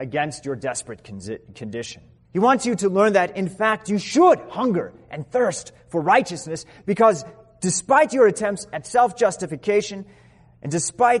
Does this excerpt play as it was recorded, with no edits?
no; 1 cut; at 2.2 s

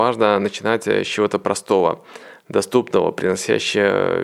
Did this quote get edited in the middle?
no; 0 cuts

